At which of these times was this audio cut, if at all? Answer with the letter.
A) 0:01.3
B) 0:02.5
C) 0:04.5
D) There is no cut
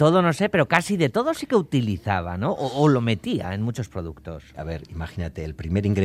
C